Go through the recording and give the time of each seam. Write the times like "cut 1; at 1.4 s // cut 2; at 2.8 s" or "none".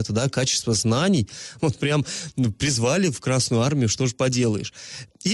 cut 1; at 1.6 s